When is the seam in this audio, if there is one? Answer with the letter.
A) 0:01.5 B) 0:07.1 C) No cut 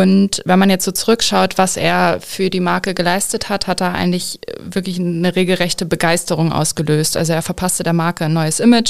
C